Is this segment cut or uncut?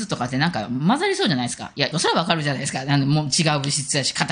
cut